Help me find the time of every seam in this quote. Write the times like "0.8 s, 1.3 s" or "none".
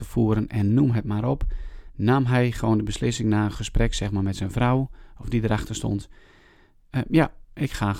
none